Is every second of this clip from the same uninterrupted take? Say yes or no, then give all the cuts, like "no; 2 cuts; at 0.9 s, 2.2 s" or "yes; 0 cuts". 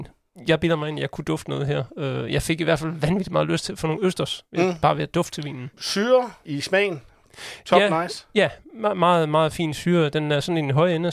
yes; 0 cuts